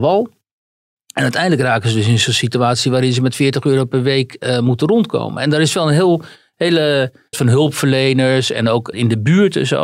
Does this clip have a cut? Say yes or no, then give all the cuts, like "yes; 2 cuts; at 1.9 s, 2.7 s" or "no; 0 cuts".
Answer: yes; 2 cuts; at 7.3 s, 8.9 s